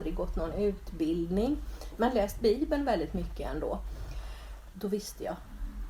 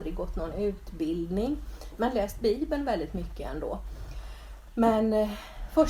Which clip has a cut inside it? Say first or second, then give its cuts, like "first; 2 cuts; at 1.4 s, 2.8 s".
first; 1 cut; at 4.7 s